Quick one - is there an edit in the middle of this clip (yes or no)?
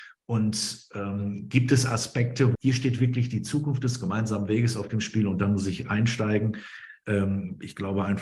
yes